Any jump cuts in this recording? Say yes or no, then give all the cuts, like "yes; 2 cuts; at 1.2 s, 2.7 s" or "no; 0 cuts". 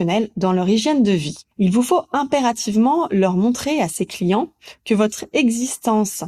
yes; 1 cut; at 1.5 s